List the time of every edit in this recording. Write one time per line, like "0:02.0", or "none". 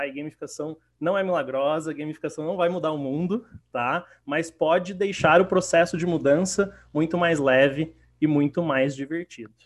none